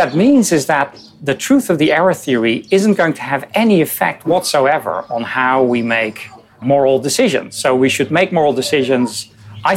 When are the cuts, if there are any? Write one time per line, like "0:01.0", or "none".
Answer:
0:06.6